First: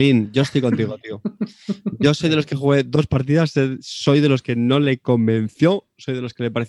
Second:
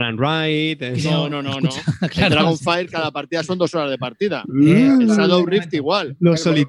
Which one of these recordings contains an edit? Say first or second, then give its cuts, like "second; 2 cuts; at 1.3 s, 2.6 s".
second; 1 cut; at 1.3 s